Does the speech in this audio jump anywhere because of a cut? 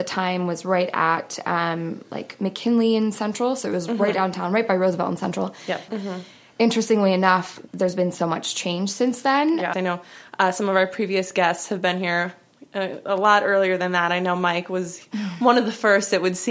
yes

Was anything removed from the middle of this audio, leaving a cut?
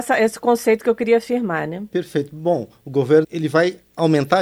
yes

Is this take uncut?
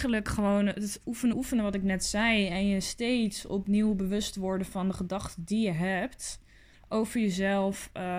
no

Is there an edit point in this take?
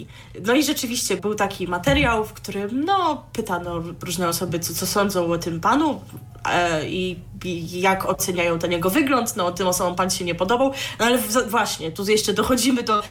yes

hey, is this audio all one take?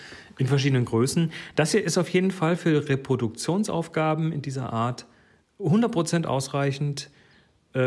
yes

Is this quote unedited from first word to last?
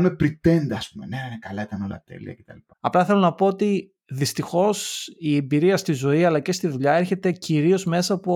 no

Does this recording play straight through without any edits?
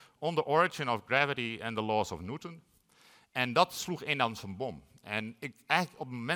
yes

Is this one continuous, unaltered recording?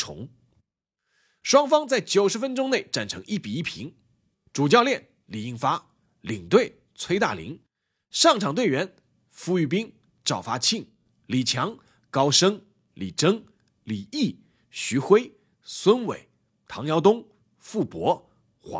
no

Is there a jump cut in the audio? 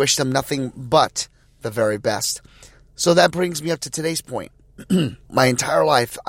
yes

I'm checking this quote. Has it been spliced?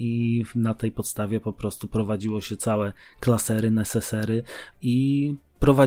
yes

